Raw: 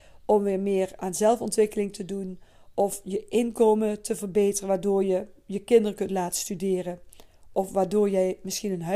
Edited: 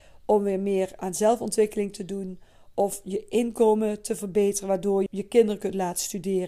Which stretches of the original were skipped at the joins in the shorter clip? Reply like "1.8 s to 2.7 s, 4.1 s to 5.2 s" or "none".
5.1 s to 5.4 s